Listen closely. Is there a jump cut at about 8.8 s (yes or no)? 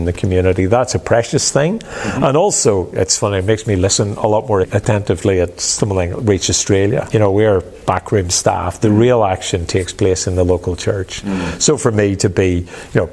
no